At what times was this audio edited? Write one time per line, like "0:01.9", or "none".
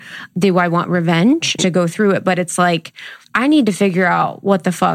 0:01.6

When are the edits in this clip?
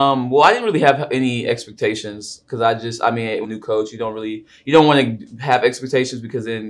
0:03.4

